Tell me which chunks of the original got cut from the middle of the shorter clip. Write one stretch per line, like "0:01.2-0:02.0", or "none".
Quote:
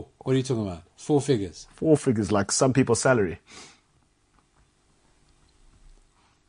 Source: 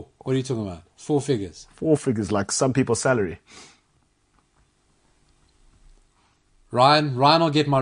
none